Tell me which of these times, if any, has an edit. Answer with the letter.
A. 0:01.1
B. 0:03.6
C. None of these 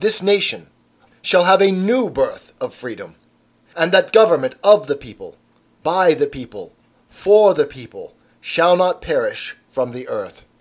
A